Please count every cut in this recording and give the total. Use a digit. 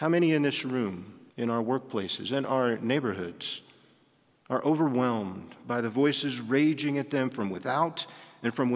1